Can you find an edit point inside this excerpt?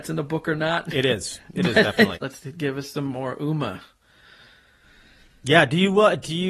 yes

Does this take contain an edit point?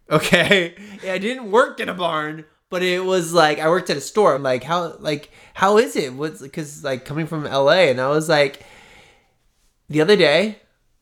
yes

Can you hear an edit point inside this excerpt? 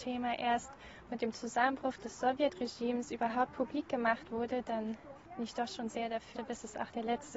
yes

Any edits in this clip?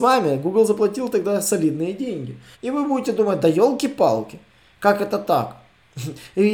yes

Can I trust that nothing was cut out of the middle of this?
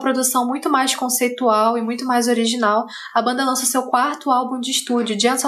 yes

